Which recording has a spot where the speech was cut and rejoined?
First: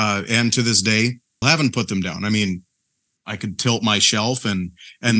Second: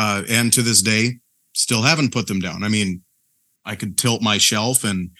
first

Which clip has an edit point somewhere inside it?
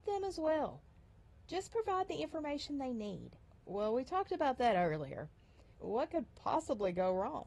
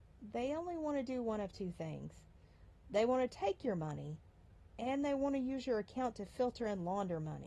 first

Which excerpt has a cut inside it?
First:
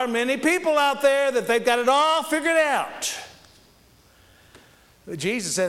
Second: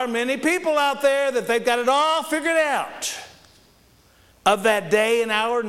second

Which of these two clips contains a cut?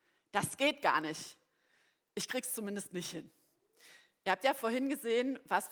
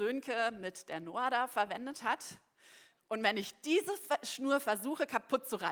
second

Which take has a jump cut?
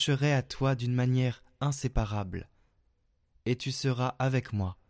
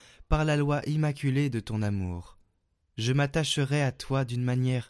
second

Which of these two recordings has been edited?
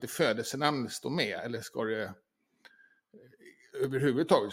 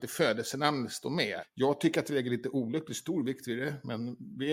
second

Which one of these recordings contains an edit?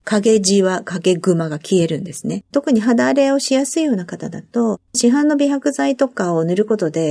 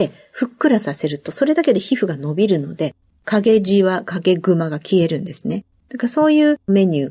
first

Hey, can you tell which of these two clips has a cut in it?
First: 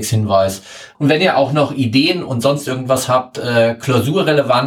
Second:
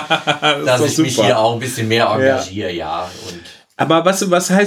first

